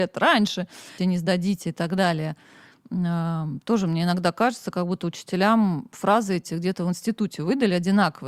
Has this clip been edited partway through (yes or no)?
yes